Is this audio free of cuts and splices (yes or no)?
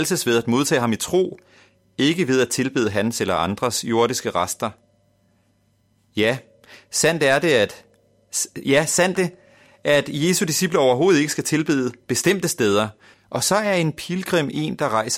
no